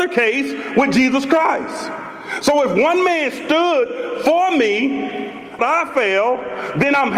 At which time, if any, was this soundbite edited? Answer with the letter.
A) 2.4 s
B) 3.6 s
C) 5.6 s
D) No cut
C